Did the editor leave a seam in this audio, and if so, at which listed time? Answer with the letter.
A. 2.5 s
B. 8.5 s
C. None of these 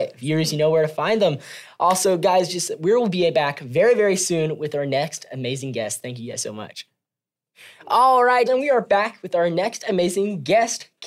B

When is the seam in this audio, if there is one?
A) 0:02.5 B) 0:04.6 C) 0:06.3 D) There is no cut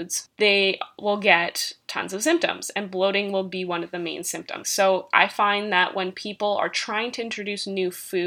B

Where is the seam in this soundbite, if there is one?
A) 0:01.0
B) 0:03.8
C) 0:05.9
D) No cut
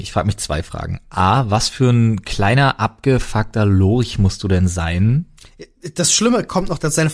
D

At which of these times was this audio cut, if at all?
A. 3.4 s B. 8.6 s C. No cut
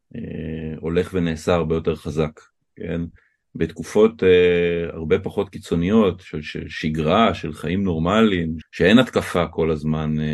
B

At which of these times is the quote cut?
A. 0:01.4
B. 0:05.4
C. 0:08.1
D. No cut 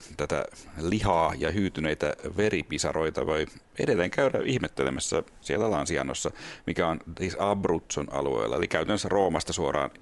B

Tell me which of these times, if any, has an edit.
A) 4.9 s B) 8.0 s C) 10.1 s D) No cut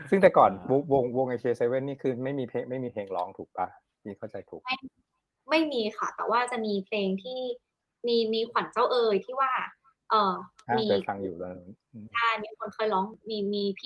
D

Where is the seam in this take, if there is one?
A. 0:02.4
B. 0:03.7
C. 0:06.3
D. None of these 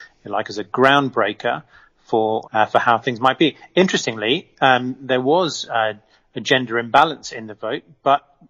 A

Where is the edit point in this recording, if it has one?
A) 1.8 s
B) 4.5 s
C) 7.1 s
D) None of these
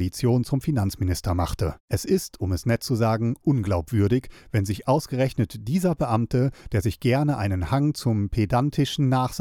A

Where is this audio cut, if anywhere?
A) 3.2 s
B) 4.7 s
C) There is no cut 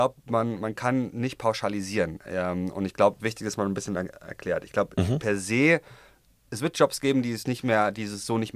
A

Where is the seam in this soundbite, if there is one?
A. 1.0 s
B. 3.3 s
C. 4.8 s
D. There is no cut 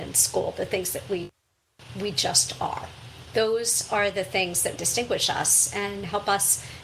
C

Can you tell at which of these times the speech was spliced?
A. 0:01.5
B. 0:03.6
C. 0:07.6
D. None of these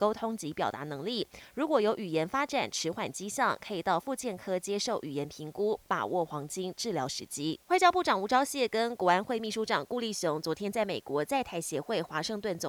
C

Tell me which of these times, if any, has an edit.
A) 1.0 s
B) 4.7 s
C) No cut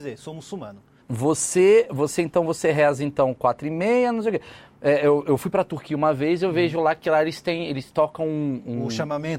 A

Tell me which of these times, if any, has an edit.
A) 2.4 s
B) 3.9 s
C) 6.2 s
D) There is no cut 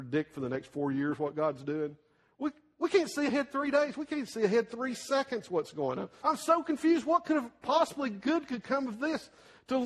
C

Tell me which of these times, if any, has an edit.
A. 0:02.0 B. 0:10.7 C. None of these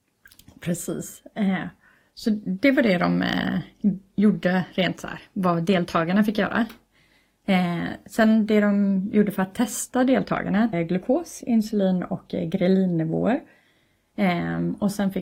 B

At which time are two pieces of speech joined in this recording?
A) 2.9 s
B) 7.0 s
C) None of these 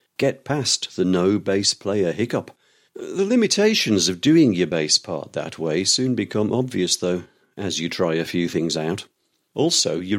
A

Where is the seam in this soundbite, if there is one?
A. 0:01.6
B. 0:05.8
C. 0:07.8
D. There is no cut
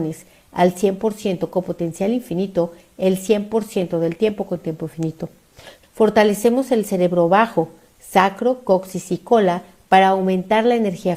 B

